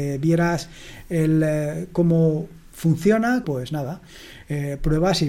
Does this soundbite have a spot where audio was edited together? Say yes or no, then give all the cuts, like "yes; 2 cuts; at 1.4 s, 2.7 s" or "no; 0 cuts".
yes; 1 cut; at 3.4 s